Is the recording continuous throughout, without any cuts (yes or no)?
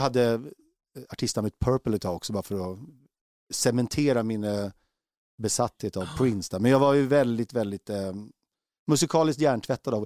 yes